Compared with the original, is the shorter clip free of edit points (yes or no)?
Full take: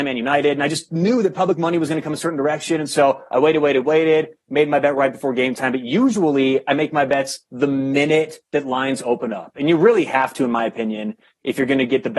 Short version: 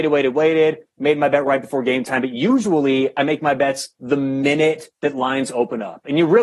yes